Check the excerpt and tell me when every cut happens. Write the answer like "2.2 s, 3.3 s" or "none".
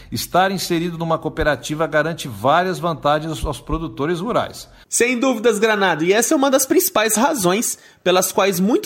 4.8 s